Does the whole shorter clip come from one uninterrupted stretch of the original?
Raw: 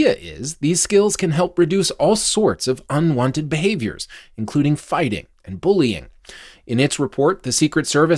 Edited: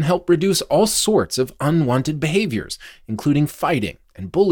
yes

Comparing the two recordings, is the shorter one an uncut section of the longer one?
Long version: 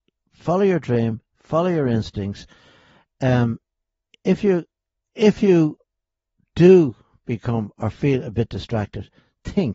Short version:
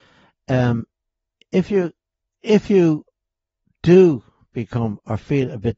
yes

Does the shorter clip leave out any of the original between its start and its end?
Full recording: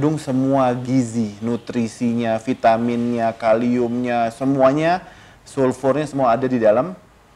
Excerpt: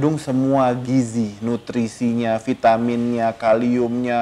no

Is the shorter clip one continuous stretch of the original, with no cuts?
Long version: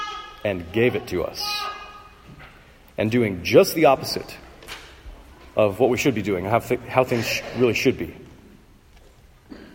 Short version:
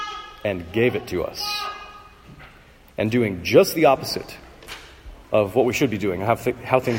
no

